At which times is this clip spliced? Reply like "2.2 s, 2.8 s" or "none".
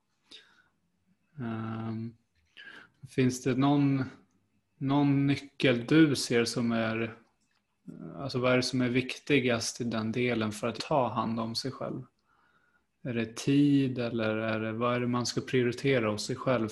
10.8 s

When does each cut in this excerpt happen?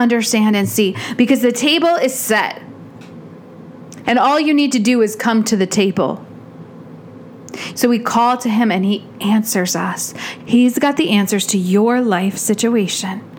4.0 s, 7.7 s, 10.4 s

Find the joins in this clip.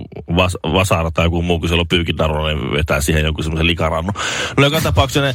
none

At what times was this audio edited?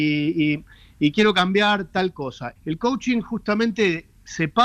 2.6 s

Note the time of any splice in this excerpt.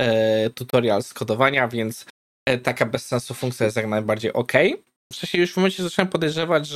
5.1 s

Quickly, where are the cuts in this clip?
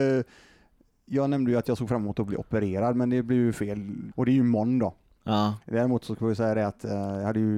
4.1 s

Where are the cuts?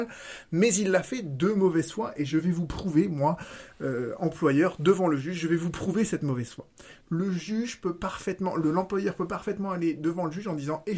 7.0 s

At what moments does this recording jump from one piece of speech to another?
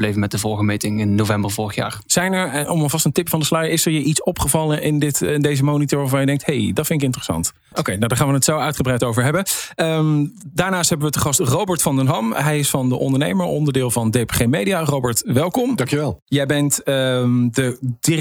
7.7 s

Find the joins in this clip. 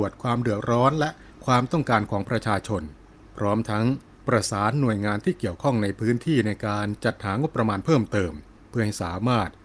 none

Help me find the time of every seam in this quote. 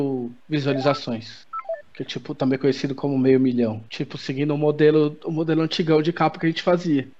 3.9 s

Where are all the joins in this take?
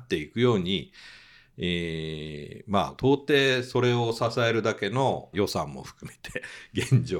3.0 s, 5.3 s

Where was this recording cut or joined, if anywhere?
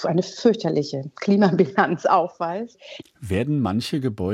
3.0 s

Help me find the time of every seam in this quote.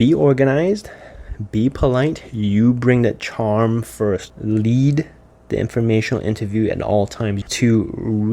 4.3 s, 7.4 s

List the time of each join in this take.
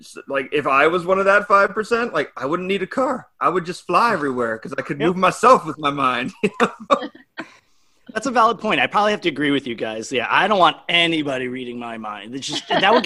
none

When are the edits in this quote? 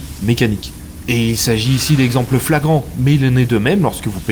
1.0 s

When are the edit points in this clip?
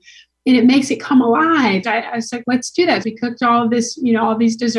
1.8 s, 3.0 s

